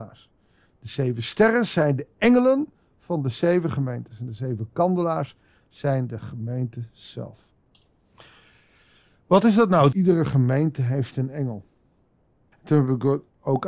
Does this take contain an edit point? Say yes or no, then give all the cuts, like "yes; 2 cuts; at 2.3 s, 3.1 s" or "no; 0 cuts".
yes; 2 cuts; at 9.9 s, 12.5 s